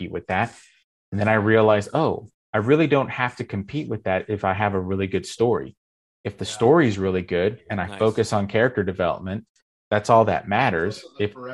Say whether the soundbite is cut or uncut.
uncut